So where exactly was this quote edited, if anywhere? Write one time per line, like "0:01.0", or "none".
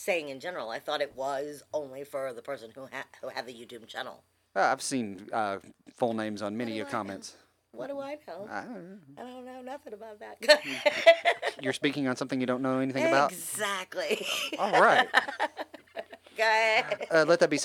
0:11.6